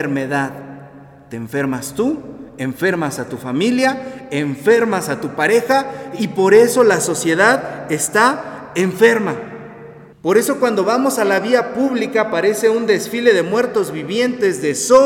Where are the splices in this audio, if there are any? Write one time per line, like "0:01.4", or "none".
0:10.1